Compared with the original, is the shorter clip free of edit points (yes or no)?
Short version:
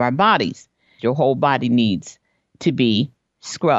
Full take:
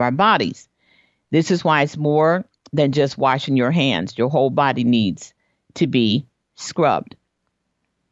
no